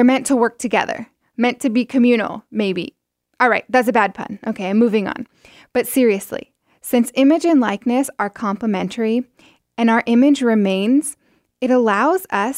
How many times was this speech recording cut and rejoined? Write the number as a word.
zero